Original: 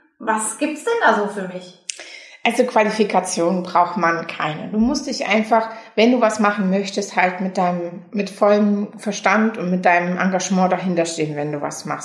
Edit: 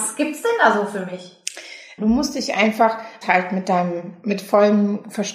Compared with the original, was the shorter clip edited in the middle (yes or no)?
yes